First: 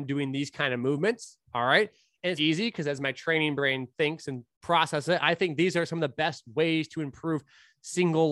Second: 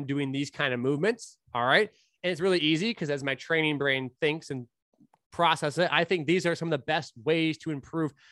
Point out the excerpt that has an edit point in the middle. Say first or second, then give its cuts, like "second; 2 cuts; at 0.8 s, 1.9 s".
first; 2 cuts; at 2.4 s, 4.5 s